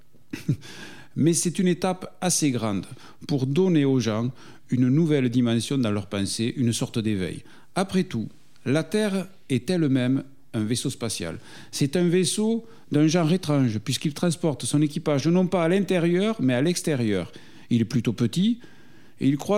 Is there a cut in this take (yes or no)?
no